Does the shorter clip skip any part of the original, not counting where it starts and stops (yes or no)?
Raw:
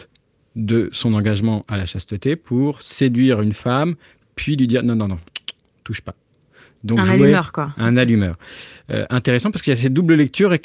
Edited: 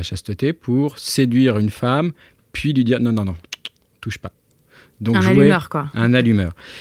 no